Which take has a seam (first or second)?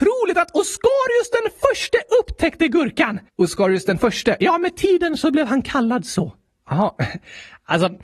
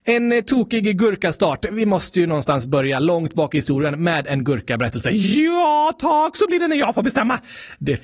first